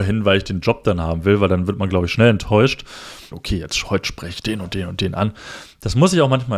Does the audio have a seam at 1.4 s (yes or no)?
no